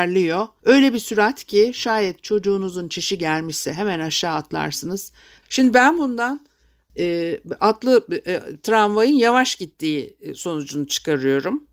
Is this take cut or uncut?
cut